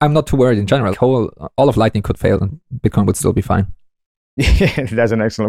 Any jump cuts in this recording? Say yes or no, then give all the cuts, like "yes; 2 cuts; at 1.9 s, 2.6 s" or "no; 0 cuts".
yes; 1 cut; at 0.9 s